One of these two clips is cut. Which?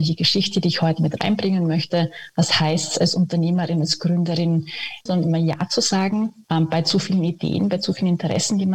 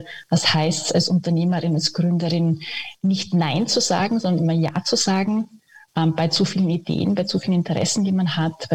first; 2 cuts; at 5.1 s, 6.4 s

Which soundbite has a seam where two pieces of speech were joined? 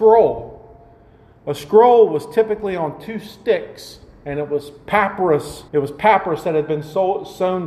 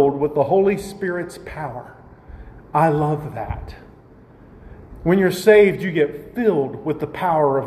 first; 1 cut; at 5.7 s

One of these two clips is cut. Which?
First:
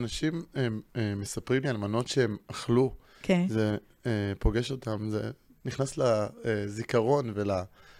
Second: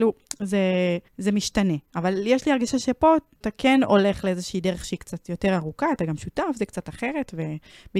second; 1 cut; at 1.1 s

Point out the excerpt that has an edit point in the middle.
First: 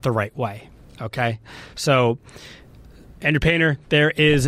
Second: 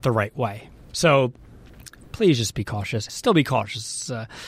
second; 2 cuts; at 0.9 s, 3.1 s

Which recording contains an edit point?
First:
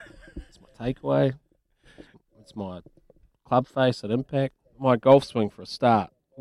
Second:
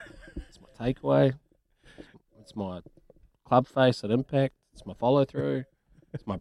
first; 1 cut; at 4.6 s

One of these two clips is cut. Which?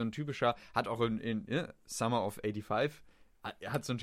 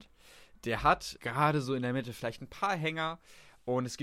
second; 1 cut; at 1.2 s

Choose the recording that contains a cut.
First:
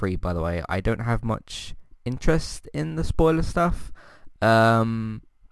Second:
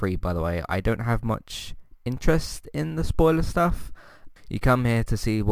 second; 1 cut; at 4.4 s

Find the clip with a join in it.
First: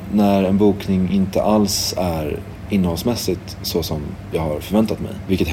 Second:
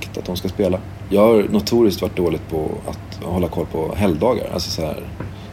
second; 1 cut; at 1.1 s

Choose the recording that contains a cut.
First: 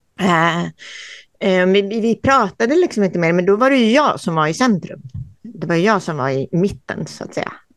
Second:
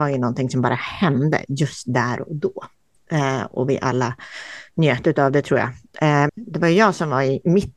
second; 1 cut; at 6.3 s

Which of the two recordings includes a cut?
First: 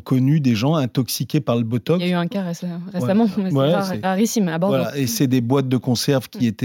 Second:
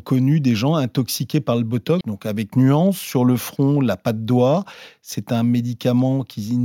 second; 1 cut; at 2.0 s

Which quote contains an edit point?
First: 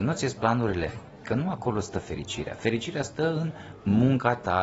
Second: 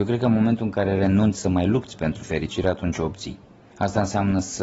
first; 1 cut; at 1.2 s

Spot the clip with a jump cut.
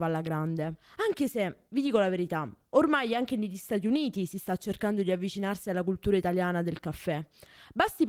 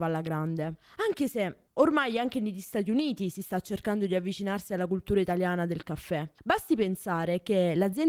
second; 2 cuts; at 1.7 s, 6.4 s

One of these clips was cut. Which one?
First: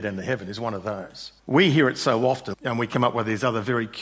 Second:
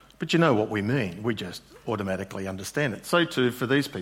first; 2 cuts; at 1.4 s, 2.5 s

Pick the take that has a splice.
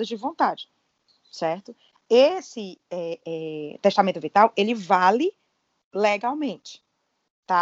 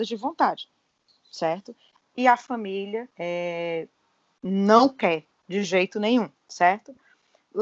second; 3 cuts; at 2.0 s, 3.1 s, 6.4 s

